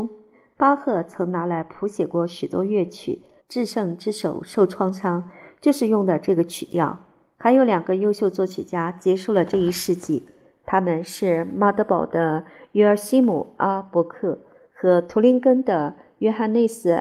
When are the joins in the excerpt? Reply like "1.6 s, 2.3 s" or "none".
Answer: 3.4 s